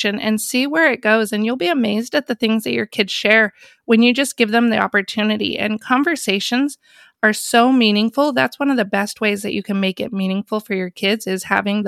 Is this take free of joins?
yes; 0 cuts

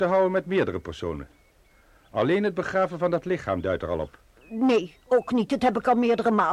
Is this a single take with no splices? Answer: no; 1 cut; at 4.4 s

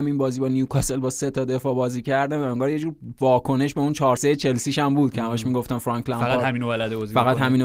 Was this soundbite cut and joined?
yes; 1 cut; at 4.2 s

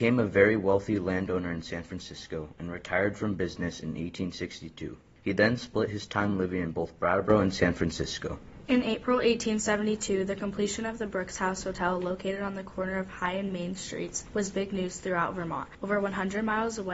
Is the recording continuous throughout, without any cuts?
yes; 0 cuts

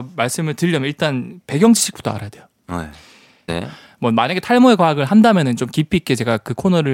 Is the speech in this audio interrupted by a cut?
yes; 1 cut; at 3.5 s

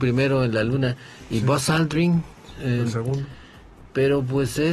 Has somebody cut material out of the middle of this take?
no; 0 cuts

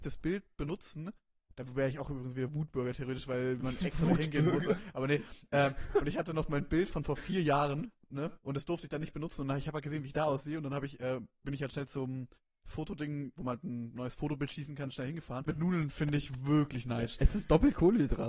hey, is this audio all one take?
no; 3 cuts; at 8.4 s, 13.4 s, 15.5 s

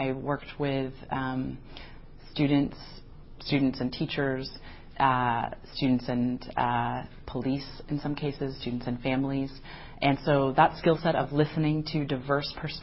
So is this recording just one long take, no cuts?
yes; 0 cuts

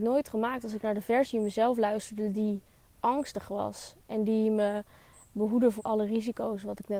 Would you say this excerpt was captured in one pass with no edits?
no; 1 cut; at 5.8 s

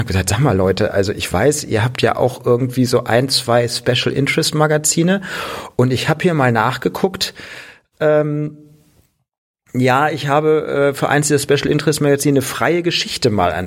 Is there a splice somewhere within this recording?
no; 0 cuts

